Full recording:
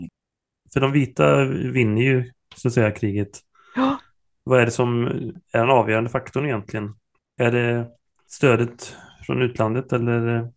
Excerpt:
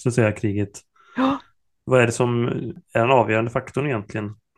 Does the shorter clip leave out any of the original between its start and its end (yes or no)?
no